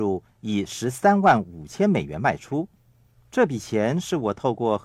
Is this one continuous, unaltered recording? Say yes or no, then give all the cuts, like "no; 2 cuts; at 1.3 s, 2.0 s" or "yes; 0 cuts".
no; 1 cut; at 3.1 s